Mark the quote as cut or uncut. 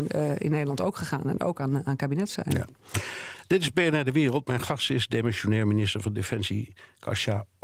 uncut